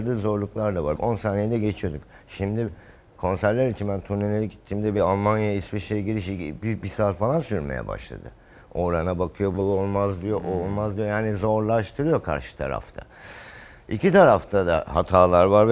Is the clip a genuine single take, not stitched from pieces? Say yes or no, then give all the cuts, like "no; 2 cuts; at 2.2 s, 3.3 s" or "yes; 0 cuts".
no; 2 cuts; at 1.0 s, 9.5 s